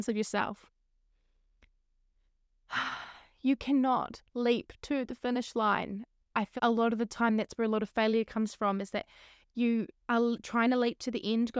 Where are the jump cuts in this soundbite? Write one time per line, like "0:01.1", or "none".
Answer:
0:06.6
0:10.0